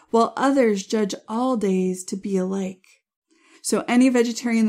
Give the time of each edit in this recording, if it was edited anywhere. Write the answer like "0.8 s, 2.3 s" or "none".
3.5 s